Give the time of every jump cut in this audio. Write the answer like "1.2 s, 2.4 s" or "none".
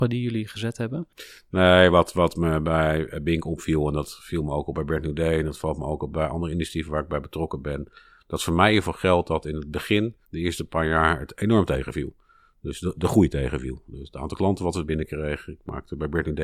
10.2 s